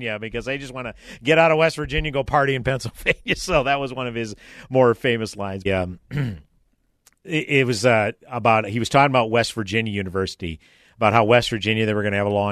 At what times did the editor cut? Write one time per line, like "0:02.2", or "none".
0:05.7